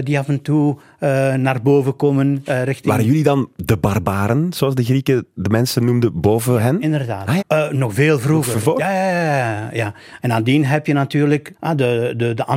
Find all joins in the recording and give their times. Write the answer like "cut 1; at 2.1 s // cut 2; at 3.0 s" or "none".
cut 1; at 7.4 s // cut 2; at 10.2 s // cut 3; at 11.5 s